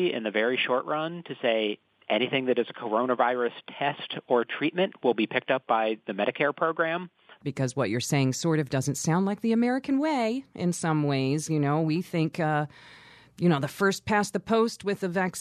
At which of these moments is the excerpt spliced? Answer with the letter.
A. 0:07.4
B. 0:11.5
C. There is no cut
A